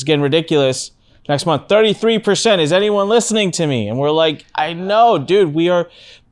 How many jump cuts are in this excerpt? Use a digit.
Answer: 0